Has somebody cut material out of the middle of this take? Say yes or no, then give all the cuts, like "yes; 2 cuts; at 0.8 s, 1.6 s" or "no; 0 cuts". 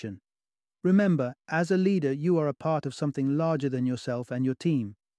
no; 0 cuts